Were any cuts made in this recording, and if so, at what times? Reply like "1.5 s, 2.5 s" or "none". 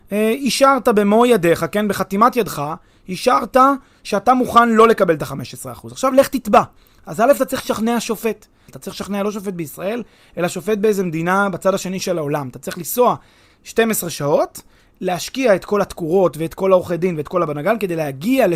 8.7 s